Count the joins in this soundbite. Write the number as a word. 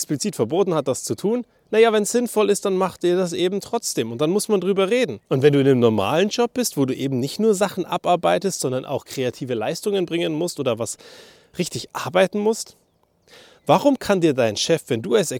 one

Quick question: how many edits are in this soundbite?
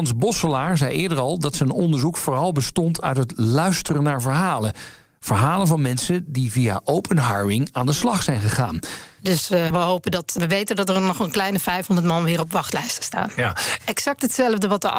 two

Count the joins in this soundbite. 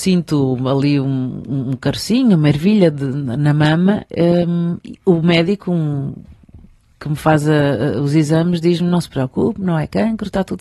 zero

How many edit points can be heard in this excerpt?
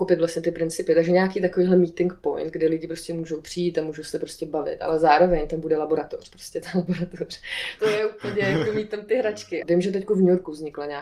two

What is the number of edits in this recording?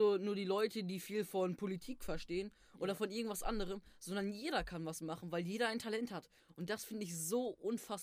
zero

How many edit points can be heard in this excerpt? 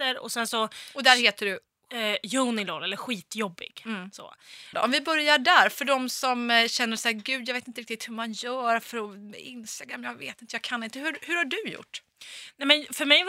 one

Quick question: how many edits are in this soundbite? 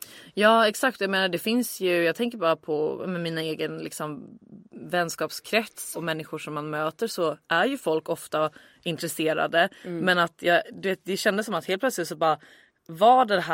one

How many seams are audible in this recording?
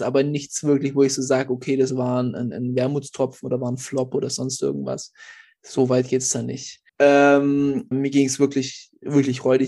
two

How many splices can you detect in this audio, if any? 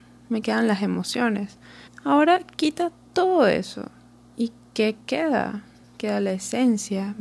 one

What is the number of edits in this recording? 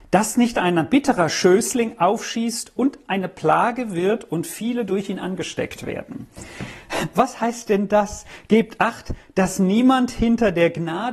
zero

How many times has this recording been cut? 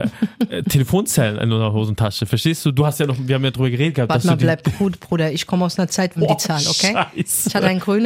one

